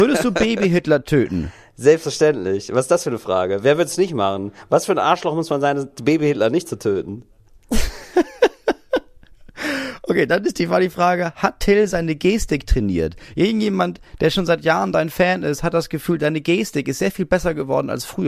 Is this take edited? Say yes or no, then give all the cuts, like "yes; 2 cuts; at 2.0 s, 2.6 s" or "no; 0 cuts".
no; 0 cuts